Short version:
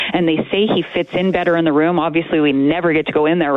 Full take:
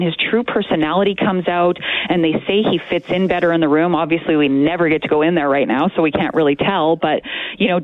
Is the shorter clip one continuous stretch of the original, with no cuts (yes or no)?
yes